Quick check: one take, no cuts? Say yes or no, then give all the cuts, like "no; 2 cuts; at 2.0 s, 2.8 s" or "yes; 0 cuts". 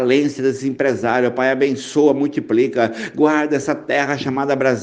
yes; 0 cuts